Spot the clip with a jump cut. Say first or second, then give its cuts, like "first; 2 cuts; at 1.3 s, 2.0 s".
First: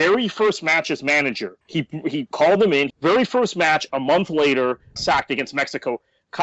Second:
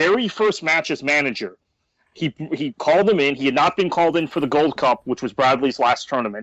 first; 3 cuts; at 1.6 s, 2.9 s, 5.0 s